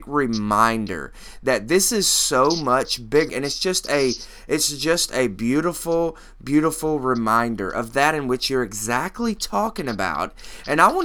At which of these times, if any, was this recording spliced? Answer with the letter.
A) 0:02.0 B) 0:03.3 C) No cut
B